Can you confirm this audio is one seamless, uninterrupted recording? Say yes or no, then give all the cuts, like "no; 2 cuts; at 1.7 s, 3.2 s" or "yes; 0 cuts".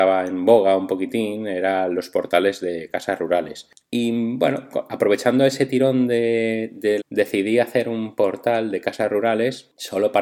no; 2 cuts; at 3.7 s, 7.0 s